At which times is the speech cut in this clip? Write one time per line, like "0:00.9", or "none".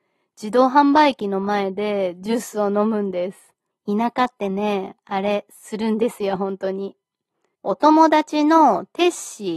0:03.7
0:07.5

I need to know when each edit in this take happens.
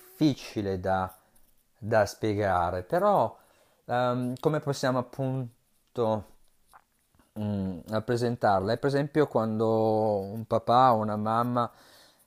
none

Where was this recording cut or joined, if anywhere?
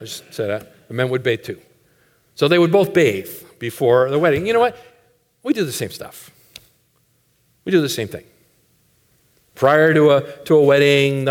none

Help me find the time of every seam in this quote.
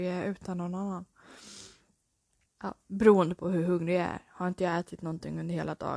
0:02.5

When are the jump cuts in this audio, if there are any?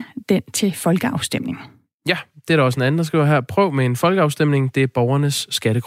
none

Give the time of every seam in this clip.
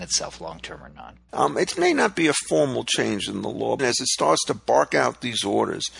0:01.3
0:03.8

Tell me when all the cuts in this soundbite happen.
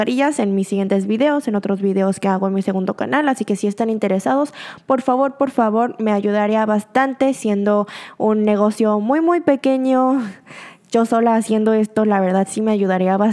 none

